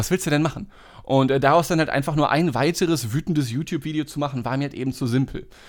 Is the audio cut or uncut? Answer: uncut